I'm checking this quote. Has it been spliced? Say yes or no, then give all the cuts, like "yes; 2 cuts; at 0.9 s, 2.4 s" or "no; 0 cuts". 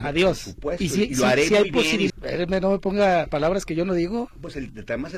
yes; 1 cut; at 2.1 s